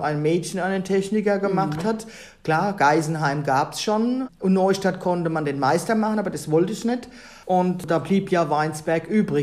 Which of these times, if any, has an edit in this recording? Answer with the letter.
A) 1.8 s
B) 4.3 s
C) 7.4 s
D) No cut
C